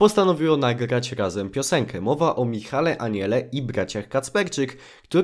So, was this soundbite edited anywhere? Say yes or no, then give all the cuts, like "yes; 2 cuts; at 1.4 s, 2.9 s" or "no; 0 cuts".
no; 0 cuts